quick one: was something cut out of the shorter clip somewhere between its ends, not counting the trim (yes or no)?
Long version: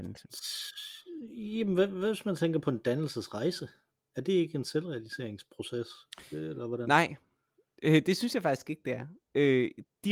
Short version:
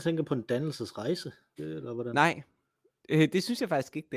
yes